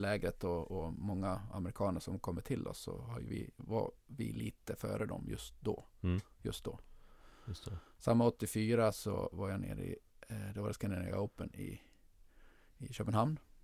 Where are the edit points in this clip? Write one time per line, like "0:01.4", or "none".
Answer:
0:10.1